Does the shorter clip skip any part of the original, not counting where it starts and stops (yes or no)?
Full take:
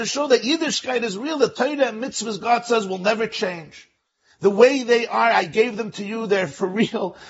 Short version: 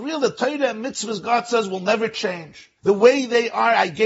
yes